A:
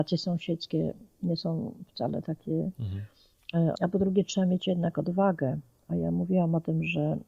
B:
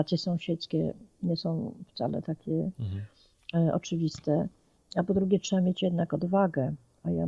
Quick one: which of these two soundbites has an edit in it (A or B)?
A